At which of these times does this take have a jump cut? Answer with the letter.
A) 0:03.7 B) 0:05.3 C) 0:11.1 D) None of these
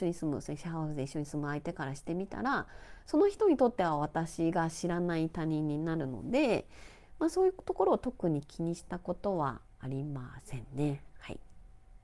D